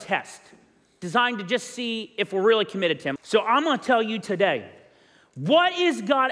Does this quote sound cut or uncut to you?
cut